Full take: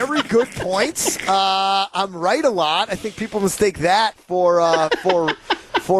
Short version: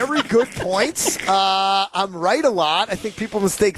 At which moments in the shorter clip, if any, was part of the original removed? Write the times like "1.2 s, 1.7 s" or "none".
none